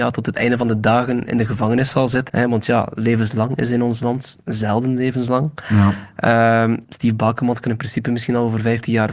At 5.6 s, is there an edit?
no; 2 cuts; at 2.3 s, 6.8 s

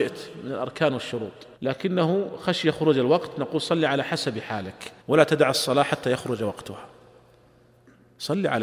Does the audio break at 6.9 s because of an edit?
no; 2 cuts; at 1.5 s, 5.0 s

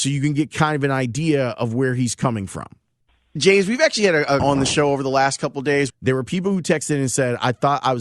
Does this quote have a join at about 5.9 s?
yes; 2 cuts; at 4.4 s, 5.9 s

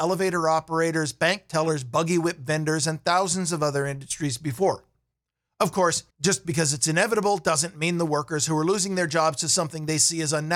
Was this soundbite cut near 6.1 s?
yes; 1 cut; at 6.1 s

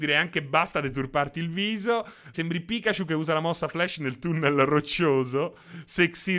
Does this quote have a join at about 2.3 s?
yes; 1 cut; at 2.3 s

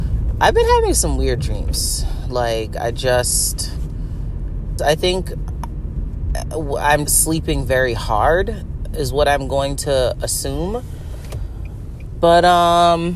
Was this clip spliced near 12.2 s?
no; 2 cuts; at 4.8 s, 7.1 s

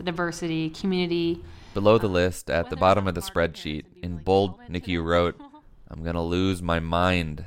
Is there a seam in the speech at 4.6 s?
yes; 1 cut; at 4.6 s

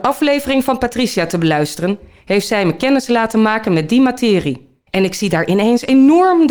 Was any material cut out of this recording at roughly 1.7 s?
no; 1 cut; at 4.9 s

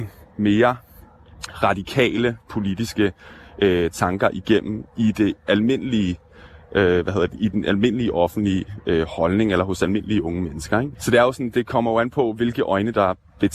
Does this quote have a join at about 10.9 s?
yes; 1 cut; at 10.9 s

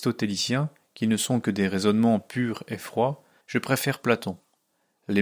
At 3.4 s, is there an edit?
yes; 1 cut; at 3.4 s

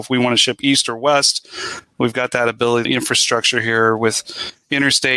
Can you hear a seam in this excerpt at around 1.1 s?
no; 1 cut; at 2.9 s

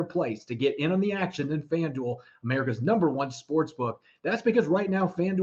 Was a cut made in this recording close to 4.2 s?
no; 0 cuts

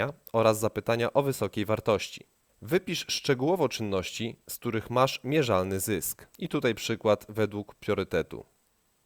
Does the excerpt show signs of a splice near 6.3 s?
yes; 2 cuts; at 2.5 s, 6.3 s

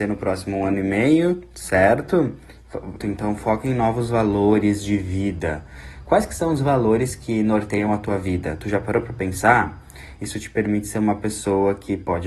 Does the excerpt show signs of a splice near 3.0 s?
yes; 2 cuts; at 3.0 s, 10.2 s

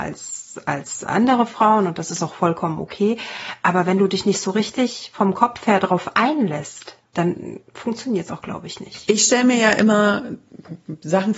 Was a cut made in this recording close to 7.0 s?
yes; 1 cut; at 7.0 s

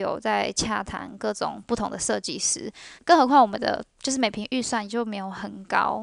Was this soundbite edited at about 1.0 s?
no; 1 cut; at 3.0 s

